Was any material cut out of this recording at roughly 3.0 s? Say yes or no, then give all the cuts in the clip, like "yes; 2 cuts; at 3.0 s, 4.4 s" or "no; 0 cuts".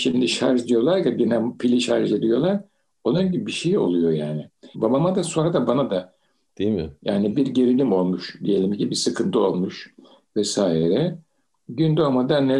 no; 2 cuts; at 4.7 s, 6.5 s